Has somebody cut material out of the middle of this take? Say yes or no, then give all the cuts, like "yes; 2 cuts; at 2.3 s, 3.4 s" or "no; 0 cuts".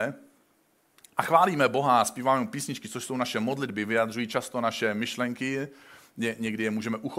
no; 0 cuts